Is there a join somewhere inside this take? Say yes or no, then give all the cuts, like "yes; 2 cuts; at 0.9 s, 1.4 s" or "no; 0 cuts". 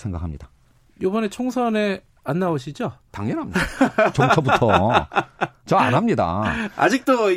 yes; 1 cut; at 4.1 s